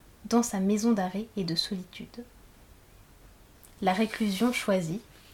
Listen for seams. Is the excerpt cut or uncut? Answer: uncut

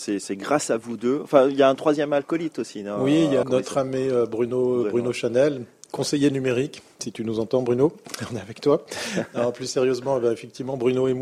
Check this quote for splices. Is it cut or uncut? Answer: cut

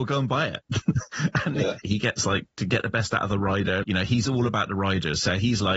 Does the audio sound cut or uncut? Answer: cut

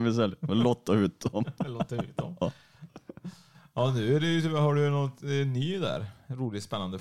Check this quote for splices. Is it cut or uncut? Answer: uncut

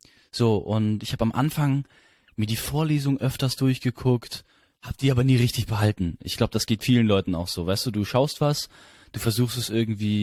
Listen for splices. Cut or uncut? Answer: uncut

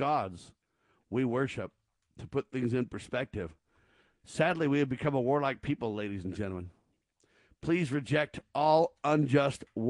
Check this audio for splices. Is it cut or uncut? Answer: uncut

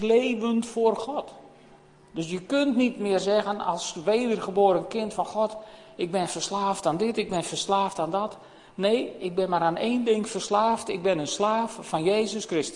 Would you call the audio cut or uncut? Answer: uncut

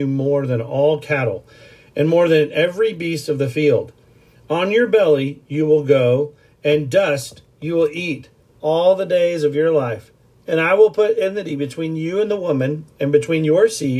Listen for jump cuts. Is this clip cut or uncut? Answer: uncut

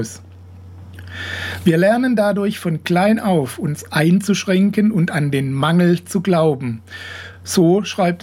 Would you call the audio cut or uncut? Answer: uncut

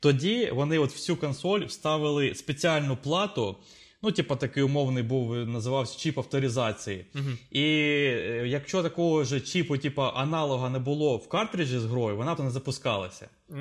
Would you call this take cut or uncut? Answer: cut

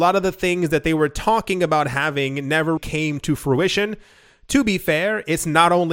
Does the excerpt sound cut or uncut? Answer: cut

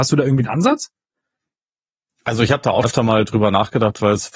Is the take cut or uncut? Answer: cut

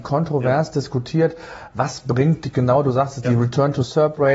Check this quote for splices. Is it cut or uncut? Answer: uncut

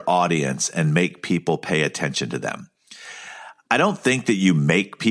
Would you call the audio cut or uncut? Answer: uncut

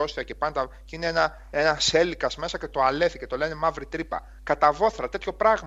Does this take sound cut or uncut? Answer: uncut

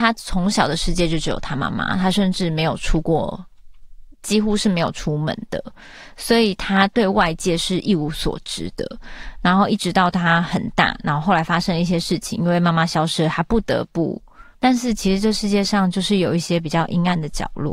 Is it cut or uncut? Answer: cut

